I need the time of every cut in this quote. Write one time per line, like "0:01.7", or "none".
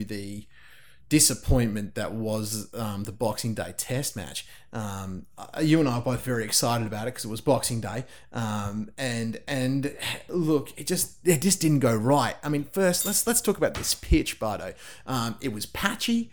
none